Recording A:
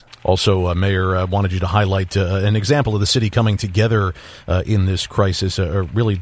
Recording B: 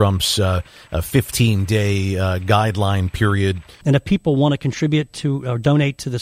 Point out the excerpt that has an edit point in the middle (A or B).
B